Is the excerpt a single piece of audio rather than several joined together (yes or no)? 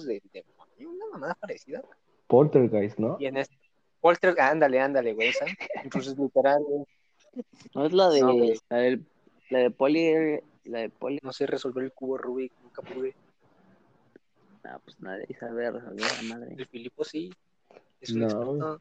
no